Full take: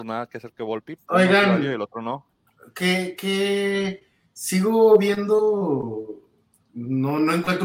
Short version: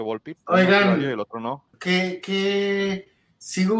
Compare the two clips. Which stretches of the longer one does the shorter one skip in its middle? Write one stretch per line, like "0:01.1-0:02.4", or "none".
0:02.4-0:02.7

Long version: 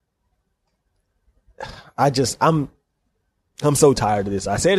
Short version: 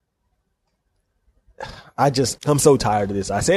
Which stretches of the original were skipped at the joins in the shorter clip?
0:02.4-0:03.5

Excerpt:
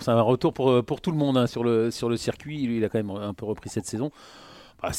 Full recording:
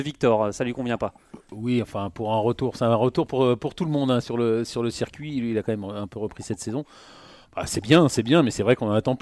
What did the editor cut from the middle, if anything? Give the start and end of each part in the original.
none

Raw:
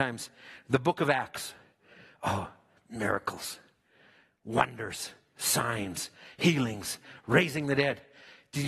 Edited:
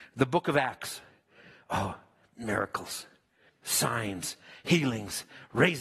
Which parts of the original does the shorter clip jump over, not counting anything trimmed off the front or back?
0:04.0-0:05.2

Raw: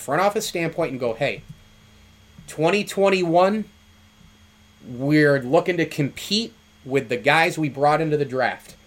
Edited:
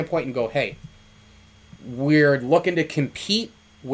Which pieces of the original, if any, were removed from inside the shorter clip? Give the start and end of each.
0:02.4-0:04.8

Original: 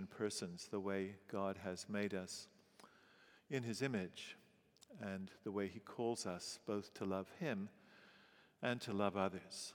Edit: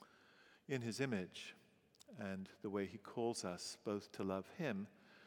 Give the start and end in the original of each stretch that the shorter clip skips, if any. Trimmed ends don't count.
none

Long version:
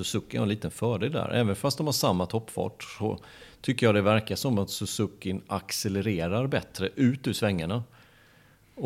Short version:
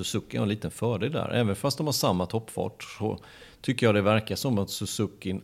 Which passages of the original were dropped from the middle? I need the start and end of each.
none

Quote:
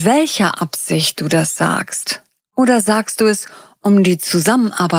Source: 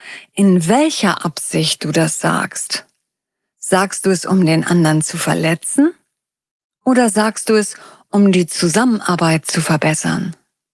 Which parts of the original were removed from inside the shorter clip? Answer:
0:03.0-0:06.7

